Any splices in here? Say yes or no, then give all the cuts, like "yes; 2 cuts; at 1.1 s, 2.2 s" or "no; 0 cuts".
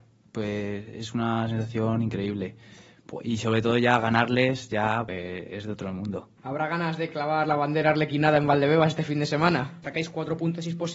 yes; 3 cuts; at 5.1 s, 6.4 s, 9.8 s